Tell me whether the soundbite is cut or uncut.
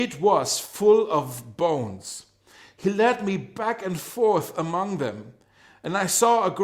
uncut